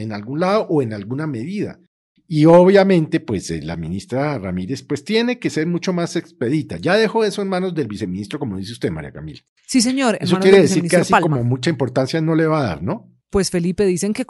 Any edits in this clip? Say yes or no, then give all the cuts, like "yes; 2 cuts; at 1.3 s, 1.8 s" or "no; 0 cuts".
no; 0 cuts